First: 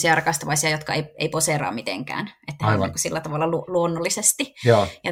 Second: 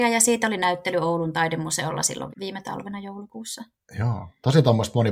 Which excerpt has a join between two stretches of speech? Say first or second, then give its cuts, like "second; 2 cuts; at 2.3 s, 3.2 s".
second; 1 cut; at 2.3 s